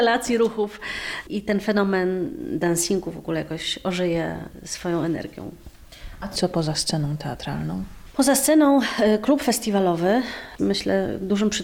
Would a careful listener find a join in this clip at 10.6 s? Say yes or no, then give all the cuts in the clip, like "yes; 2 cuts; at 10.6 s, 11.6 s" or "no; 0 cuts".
yes; 1 cut; at 10.6 s